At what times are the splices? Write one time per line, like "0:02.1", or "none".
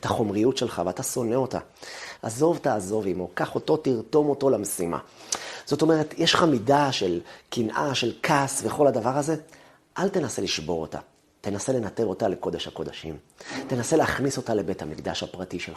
0:02.2